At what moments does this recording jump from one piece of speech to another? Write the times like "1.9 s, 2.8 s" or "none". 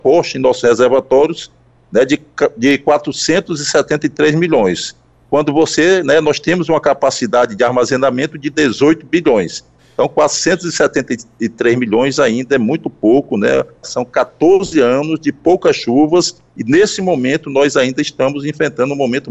13.8 s